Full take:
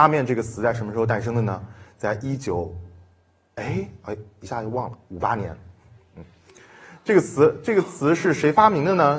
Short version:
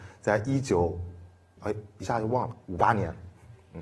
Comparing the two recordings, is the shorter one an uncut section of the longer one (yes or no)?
no